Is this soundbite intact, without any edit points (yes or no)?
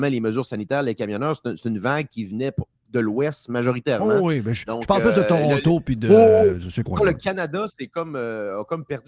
yes